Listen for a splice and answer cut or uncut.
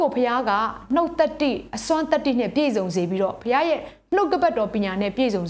uncut